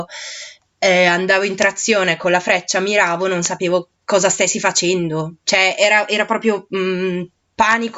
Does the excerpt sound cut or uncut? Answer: uncut